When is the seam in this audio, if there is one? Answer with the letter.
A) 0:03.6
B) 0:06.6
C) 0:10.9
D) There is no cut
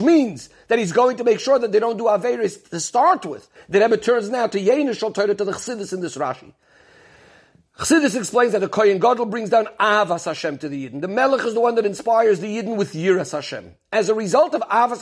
A